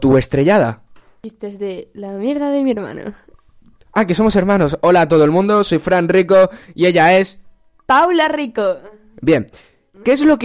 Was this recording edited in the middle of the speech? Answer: no; 0 cuts

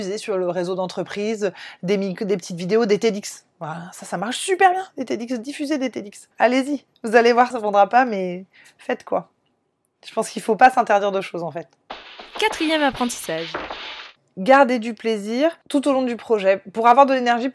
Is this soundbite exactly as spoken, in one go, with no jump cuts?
no; 1 cut; at 7.5 s

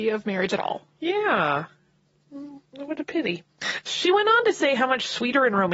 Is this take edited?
no; 0 cuts

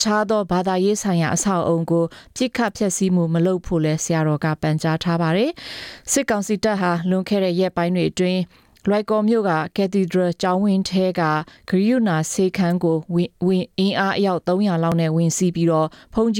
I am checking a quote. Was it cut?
no; 0 cuts

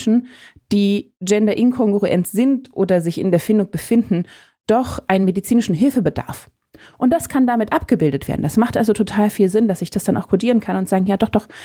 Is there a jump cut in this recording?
no; 0 cuts

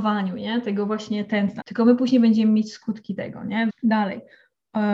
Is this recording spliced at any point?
yes; 2 cuts; at 1.6 s, 3.7 s

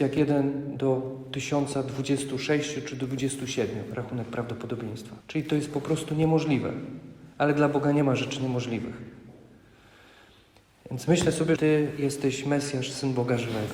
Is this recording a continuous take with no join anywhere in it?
no; 2 cuts; at 5.2 s, 11.6 s

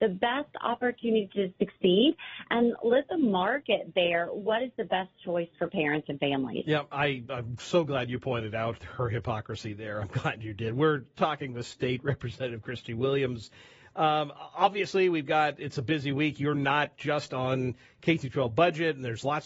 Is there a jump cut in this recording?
no; 0 cuts

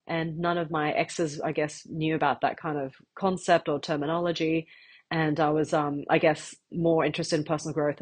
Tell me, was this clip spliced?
yes; 1 cut; at 6.7 s

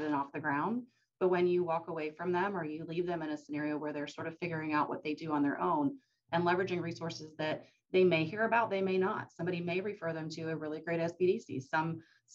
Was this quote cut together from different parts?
no; 0 cuts

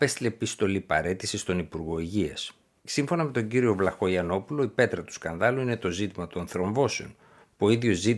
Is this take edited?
yes; 1 cut; at 2.8 s

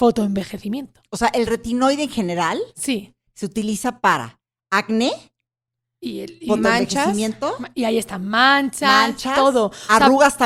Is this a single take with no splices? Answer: yes; 0 cuts

